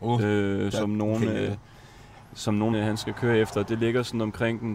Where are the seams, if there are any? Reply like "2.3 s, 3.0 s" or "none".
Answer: 2.7 s